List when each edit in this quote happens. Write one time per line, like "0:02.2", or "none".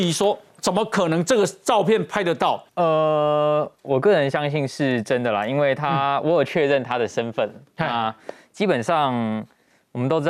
0:02.7